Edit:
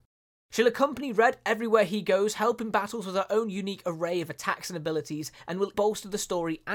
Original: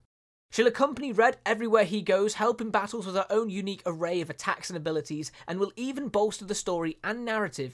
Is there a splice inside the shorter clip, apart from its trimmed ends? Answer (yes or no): yes